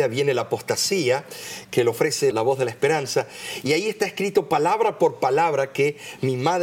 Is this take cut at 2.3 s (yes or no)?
yes